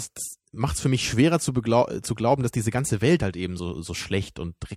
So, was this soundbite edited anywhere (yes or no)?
no